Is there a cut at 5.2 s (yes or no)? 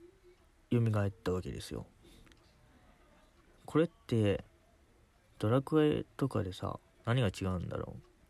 no